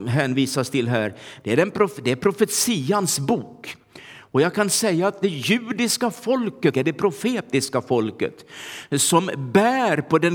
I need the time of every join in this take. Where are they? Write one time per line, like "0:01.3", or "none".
0:01.4
0:06.7